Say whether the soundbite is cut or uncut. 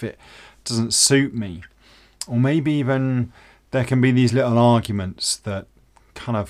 uncut